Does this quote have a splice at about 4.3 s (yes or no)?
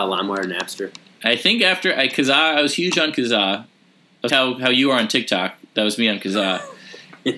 yes